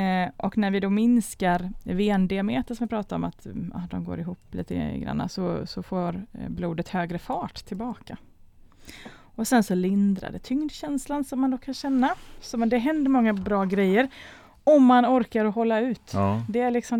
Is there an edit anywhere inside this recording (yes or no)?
no